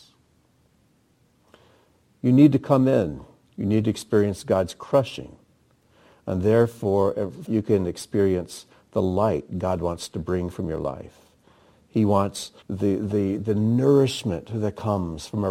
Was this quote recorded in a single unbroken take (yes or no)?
no